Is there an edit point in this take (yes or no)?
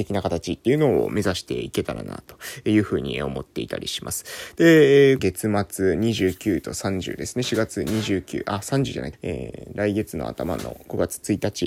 yes